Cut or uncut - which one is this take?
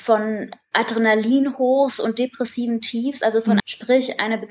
cut